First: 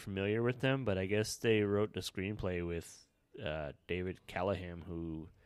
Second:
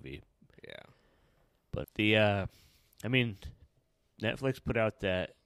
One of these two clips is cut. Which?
second; 1 cut; at 1.8 s

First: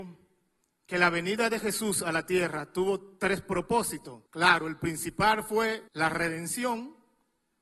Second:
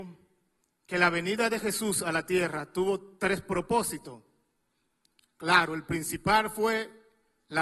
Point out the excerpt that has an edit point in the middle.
first; 2 cuts; at 4.3 s, 5.9 s

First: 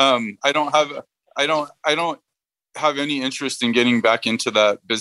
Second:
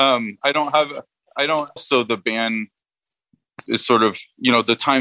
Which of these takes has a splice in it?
second; 2 cuts; at 1.8 s, 3.7 s

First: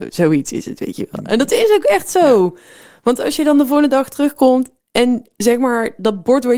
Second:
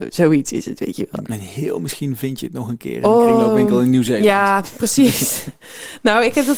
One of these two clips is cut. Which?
second; 1 cut; at 1.2 s

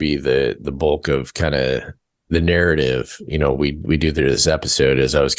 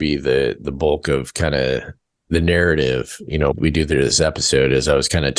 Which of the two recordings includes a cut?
second; 1 cut; at 3.5 s

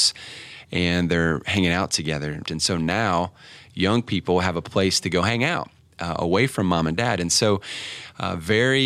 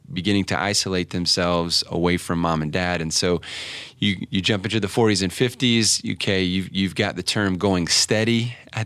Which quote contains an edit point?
first; 1 cut; at 2.4 s

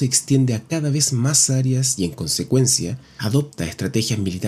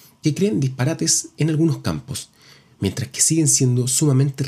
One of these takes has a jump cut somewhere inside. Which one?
first; 1 cut; at 3.2 s

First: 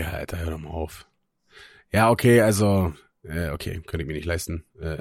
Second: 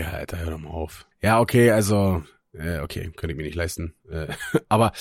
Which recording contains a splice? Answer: second; 1 cut; at 1.1 s

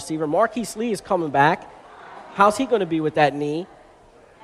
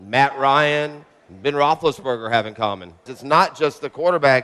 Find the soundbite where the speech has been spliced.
second; 1 cut; at 3.1 s

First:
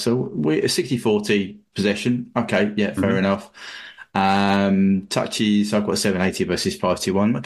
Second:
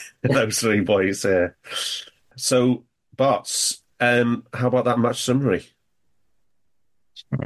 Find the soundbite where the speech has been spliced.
second; 1 cut; at 2.3 s

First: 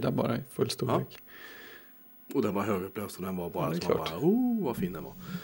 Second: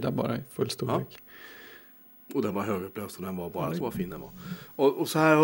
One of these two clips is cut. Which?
second; 1 cut; at 3.8 s

